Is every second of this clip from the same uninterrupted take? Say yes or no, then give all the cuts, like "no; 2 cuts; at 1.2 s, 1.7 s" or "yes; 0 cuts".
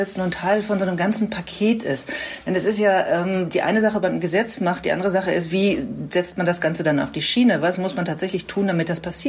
yes; 0 cuts